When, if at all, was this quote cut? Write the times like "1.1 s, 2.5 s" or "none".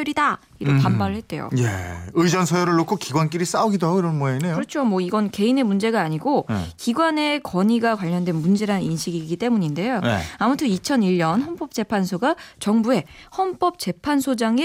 none